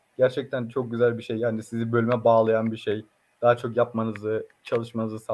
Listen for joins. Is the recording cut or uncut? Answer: uncut